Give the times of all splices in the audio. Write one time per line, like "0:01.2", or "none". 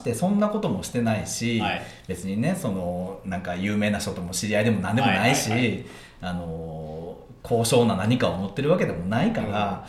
none

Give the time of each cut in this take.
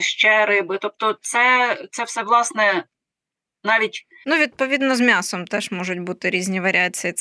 0:04.2

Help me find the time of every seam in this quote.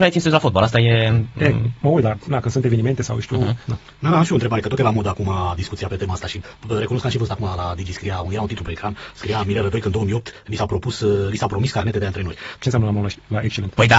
0:03.7
0:12.6

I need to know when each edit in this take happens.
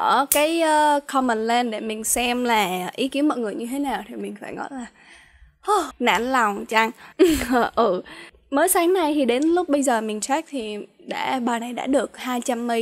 0:05.9
0:07.1

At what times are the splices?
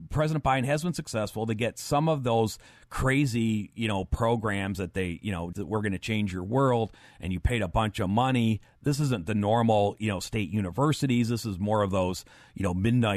0:05.5

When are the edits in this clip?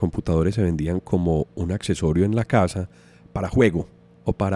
none

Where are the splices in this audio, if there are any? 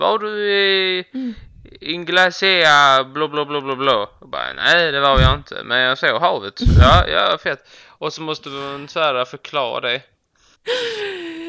0:10.5

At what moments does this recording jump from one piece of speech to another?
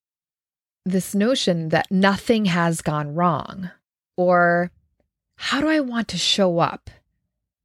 0:04.1

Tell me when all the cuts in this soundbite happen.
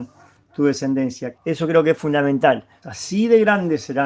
0:01.4
0:02.8

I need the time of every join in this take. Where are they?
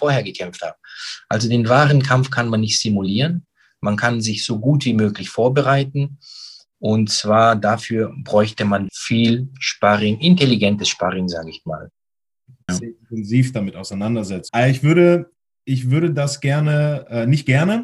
0:08.9
0:12.7
0:14.5

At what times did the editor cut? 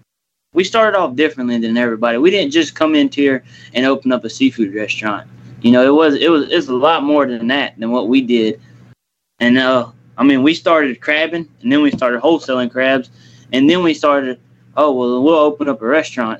0:11.6

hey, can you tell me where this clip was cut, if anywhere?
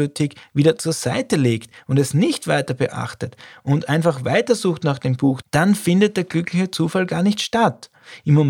0:05.4

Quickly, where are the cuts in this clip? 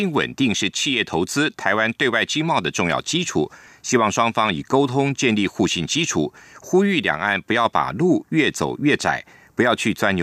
0:03.7

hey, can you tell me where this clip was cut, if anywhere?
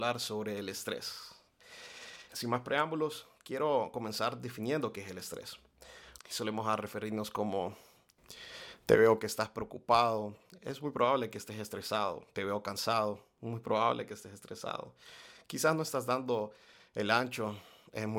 0:02.3
0:06.2

